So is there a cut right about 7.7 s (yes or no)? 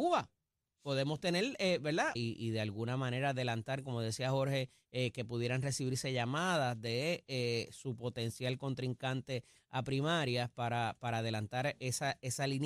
no